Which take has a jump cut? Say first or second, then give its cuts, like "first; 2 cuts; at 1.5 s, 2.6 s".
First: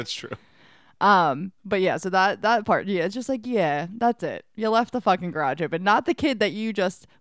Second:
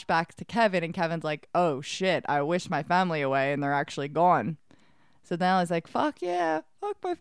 first; 1 cut; at 1.6 s